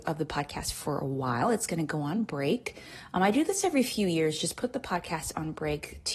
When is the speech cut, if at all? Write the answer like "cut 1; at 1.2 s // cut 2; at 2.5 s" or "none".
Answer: none